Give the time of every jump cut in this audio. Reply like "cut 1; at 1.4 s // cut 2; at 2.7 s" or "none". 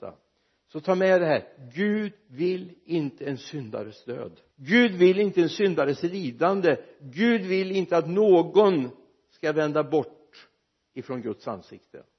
cut 1; at 4.5 s